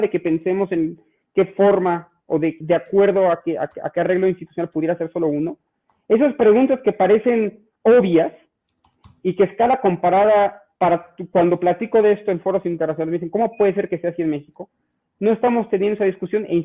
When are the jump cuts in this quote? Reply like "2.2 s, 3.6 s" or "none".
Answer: 2.6 s